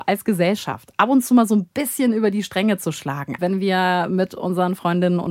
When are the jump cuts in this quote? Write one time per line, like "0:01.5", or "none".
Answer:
0:03.4